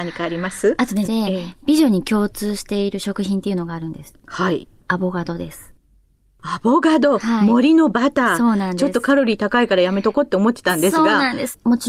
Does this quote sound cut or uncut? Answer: cut